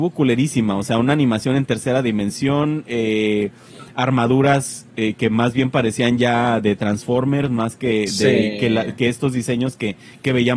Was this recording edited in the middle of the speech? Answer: no; 0 cuts

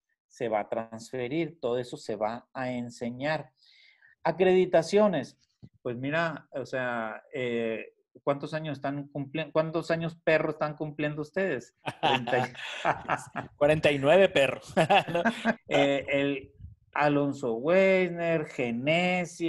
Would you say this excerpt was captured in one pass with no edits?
no; 1 cut; at 15.6 s

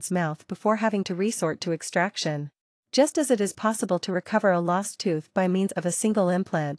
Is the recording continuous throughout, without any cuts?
no; 1 cut; at 2.8 s

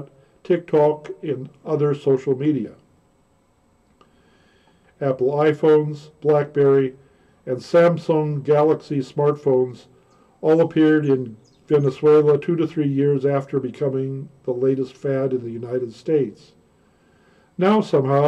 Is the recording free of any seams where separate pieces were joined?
no; 1 cut; at 4.8 s

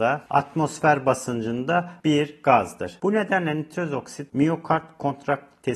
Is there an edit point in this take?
yes; 1 cut; at 3.0 s

